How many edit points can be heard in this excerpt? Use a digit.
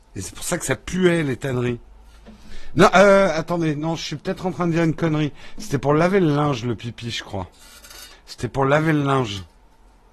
1